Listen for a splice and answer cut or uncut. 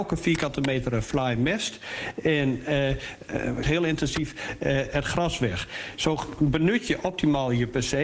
cut